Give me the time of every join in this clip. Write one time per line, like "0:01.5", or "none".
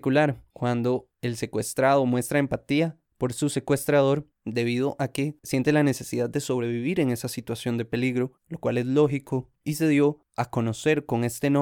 0:05.4